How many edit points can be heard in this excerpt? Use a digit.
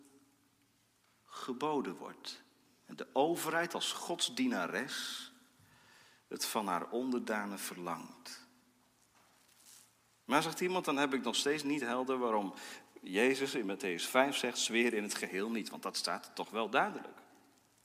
0